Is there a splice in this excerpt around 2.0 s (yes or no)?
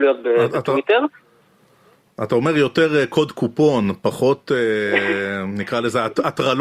no